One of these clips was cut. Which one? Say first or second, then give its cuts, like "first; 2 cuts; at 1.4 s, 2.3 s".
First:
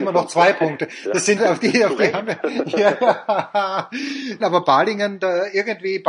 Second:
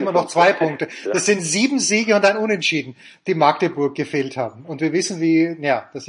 first; 2 cuts; at 1.4 s, 4.4 s